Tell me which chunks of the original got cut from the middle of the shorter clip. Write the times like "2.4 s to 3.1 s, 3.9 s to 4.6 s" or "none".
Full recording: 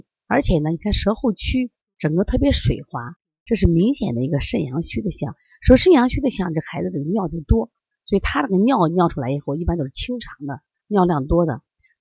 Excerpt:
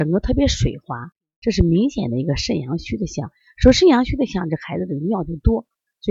none